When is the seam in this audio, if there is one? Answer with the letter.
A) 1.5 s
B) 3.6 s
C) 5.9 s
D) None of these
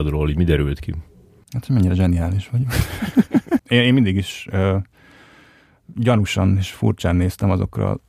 B